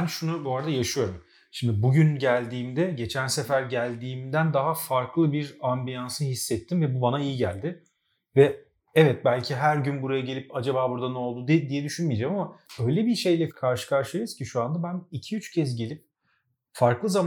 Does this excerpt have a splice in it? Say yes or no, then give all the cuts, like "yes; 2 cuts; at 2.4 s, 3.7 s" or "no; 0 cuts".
no; 0 cuts